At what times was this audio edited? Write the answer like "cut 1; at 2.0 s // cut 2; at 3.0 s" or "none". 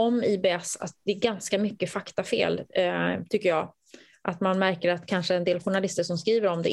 none